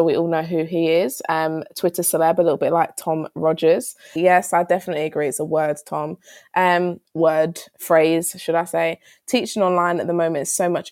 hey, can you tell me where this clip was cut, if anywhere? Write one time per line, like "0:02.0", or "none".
0:04.2